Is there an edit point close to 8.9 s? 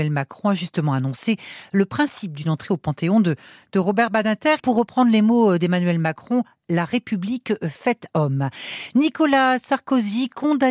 no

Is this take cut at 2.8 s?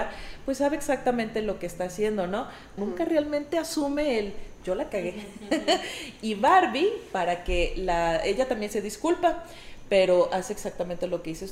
yes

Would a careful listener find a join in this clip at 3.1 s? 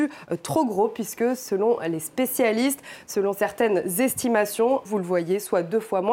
no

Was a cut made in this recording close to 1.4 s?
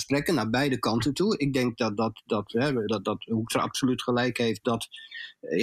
no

